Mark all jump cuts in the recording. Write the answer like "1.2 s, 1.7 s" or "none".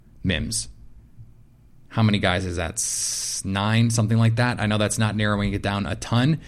none